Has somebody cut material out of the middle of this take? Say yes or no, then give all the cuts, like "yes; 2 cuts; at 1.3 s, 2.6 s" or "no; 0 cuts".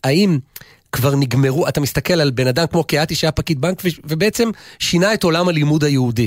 no; 0 cuts